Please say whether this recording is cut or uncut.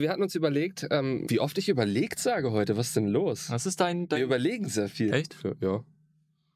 cut